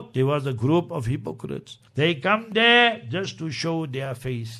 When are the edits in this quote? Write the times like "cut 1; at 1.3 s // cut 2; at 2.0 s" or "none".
cut 1; at 1.9 s